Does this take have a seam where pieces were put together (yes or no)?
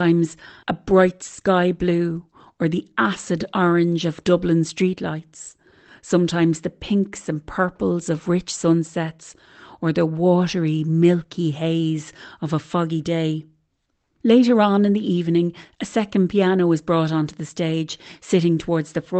no